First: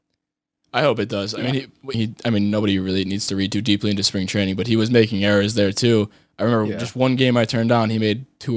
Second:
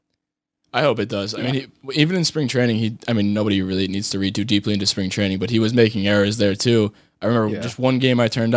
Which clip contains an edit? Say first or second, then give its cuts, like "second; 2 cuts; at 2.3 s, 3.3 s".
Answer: first; 1 cut; at 1.9 s